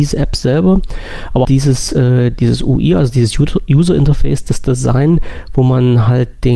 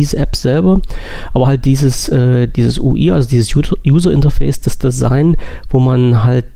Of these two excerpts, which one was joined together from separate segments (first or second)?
first